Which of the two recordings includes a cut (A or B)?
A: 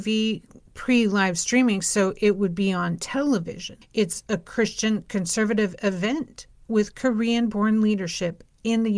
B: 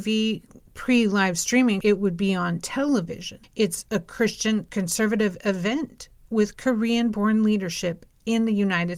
B